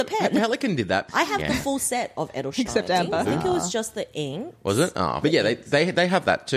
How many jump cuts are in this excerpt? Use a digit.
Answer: 3